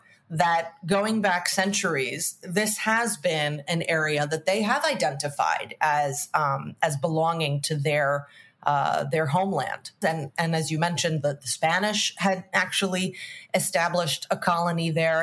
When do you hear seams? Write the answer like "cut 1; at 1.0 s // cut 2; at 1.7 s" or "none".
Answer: cut 1; at 10.0 s